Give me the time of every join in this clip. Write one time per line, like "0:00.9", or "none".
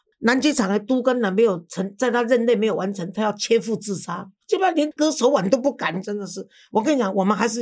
0:04.4
0:06.0